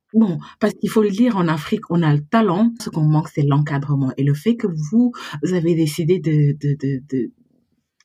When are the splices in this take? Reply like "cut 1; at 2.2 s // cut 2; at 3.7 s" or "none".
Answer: cut 1; at 2.8 s